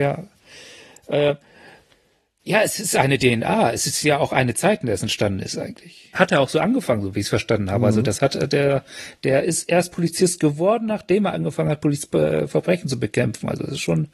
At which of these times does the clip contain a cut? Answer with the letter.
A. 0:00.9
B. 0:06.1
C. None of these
B